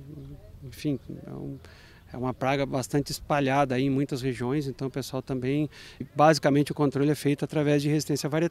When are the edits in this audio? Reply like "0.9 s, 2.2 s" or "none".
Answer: 6.0 s